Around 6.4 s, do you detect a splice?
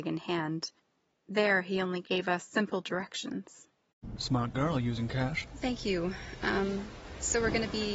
no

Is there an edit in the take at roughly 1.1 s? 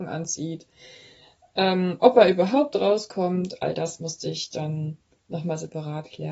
no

